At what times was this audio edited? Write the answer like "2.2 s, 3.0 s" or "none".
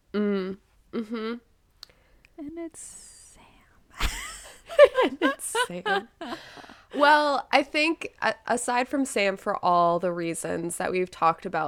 none